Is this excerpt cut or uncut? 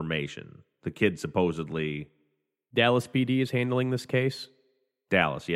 uncut